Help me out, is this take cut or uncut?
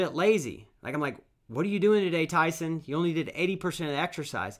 uncut